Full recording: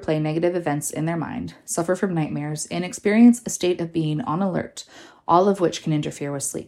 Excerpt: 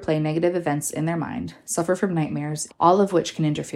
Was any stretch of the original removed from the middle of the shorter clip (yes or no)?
yes